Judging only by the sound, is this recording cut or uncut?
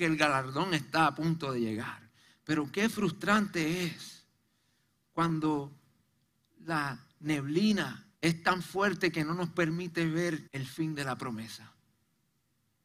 cut